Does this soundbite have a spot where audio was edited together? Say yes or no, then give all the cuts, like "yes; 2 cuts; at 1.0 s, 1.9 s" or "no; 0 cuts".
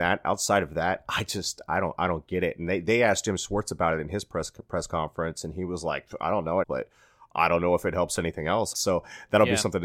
yes; 2 cuts; at 6.6 s, 8.7 s